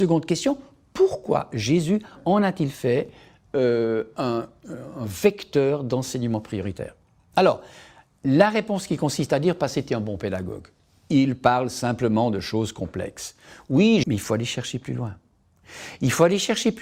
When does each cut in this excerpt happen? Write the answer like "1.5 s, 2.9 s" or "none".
14.0 s